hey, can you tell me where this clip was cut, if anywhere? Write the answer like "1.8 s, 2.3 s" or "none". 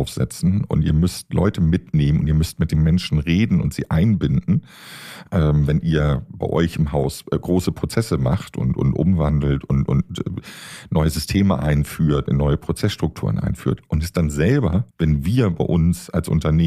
12.3 s, 14.9 s